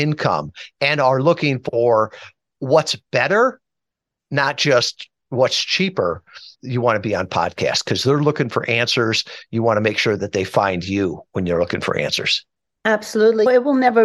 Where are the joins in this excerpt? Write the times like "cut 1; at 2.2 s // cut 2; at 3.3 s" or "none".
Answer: cut 1; at 6.5 s